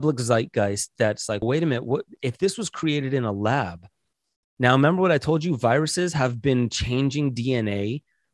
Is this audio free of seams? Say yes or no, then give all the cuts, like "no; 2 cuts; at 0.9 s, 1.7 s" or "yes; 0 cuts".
no; 1 cut; at 1.4 s